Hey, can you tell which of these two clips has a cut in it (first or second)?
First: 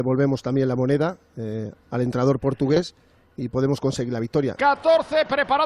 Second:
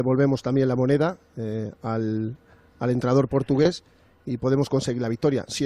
first